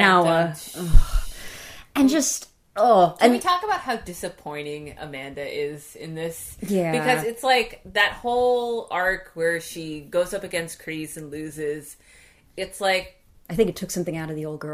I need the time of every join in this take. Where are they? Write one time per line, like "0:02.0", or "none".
none